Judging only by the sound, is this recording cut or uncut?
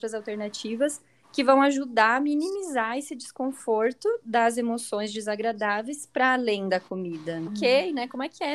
cut